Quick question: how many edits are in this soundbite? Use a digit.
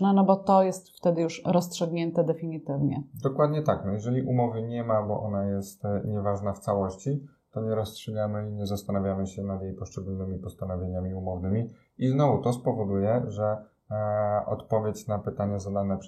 0